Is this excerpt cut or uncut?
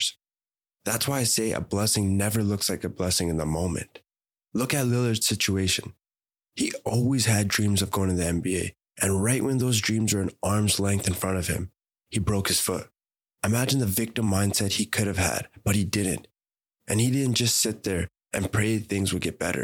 uncut